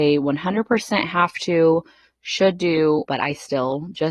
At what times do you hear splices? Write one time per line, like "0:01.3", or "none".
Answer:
0:03.1